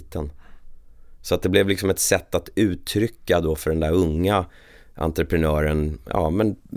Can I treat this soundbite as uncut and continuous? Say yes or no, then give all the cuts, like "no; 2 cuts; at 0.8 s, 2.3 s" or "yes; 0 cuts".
yes; 0 cuts